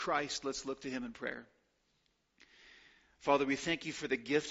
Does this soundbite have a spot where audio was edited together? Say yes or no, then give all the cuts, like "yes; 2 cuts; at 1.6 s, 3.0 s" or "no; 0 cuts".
no; 0 cuts